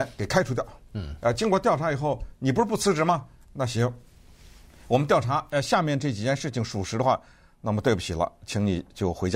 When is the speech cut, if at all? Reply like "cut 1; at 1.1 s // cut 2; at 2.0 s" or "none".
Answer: none